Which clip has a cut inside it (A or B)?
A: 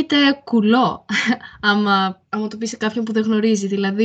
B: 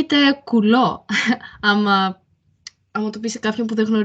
A